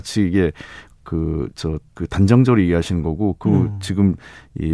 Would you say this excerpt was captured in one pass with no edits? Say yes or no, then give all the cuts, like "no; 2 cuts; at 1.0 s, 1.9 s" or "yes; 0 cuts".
no; 1 cut; at 1.9 s